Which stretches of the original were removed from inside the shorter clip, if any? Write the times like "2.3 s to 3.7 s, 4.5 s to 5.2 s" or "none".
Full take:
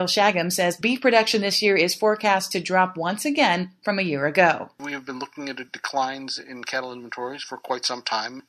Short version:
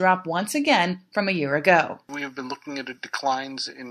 none